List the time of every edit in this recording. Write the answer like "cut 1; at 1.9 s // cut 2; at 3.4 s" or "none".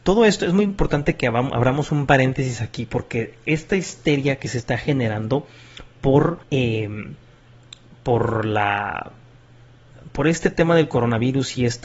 cut 1; at 6.4 s